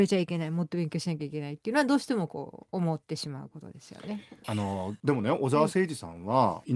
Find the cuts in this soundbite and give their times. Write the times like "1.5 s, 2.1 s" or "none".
4.4 s